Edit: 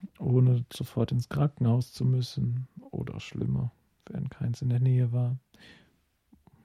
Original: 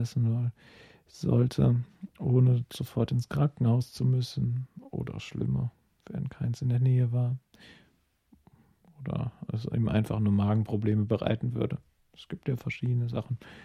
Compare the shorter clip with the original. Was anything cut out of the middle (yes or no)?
no